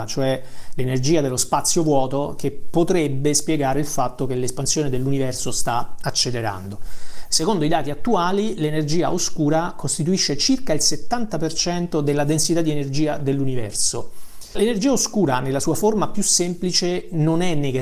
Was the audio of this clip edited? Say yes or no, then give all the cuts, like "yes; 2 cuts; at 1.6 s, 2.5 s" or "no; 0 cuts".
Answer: no; 0 cuts